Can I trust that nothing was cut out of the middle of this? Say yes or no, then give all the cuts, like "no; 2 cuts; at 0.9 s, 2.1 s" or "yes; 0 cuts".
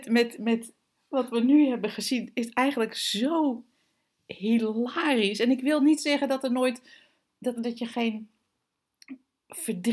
no; 1 cut; at 7.6 s